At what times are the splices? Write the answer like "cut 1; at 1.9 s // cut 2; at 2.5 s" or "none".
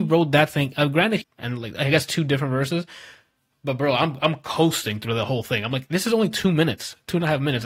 cut 1; at 1.2 s